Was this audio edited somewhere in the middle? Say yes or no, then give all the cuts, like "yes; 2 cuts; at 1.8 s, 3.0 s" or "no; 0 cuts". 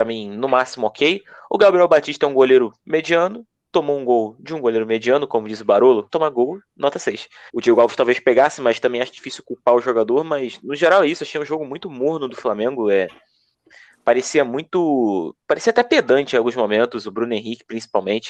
yes; 2 cuts; at 6.1 s, 7.5 s